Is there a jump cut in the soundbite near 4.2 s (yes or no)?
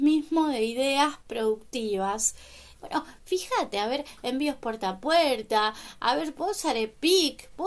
no